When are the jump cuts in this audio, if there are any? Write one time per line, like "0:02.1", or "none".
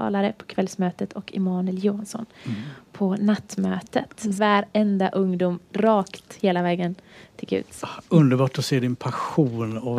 0:04.4

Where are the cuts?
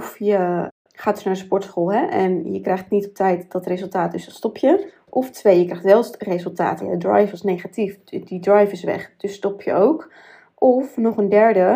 0:06.8

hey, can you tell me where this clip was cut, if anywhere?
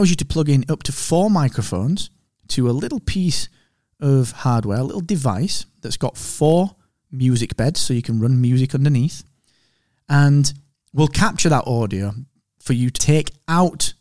0:13.0

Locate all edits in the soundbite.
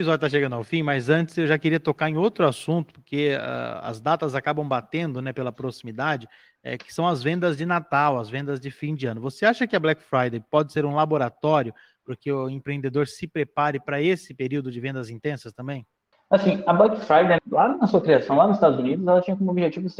0:17.4

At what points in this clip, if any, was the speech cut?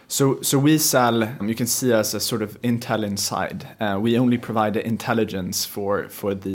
0:01.4

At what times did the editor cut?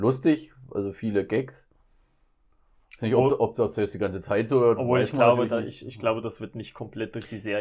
none

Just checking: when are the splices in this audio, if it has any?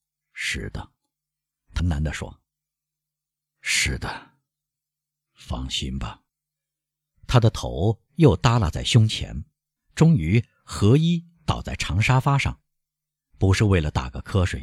0:01.8
0:06.3
0:09.8

